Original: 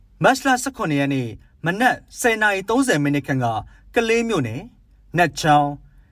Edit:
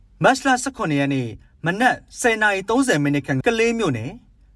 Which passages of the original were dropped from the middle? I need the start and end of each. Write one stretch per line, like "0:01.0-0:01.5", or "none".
0:03.4-0:03.9